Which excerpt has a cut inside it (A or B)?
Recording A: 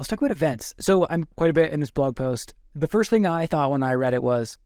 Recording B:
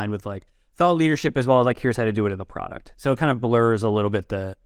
A